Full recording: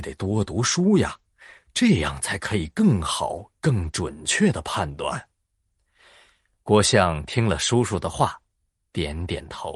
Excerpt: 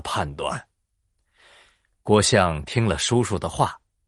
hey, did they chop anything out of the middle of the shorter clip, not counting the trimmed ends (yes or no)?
no